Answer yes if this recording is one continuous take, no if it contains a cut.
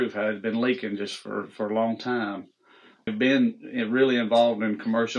no